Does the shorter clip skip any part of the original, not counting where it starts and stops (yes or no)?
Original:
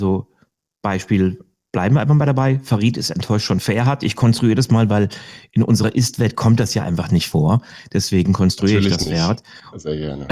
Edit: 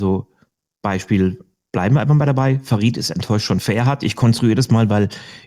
no